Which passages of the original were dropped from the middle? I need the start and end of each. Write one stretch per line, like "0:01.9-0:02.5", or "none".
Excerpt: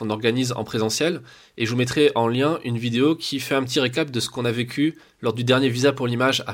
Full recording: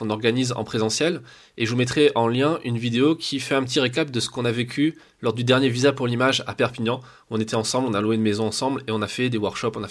none